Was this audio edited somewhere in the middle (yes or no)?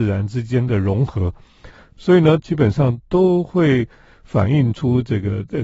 yes